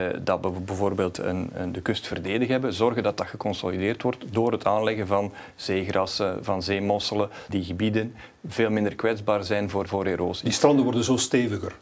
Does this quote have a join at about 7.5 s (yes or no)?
yes